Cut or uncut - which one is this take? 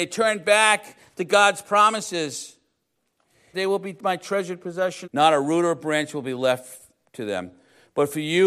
cut